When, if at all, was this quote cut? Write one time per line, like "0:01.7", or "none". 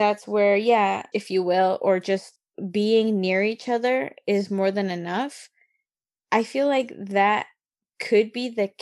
0:01.1